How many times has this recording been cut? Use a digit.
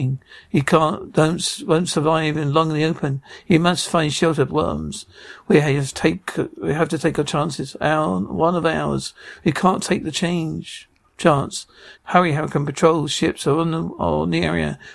2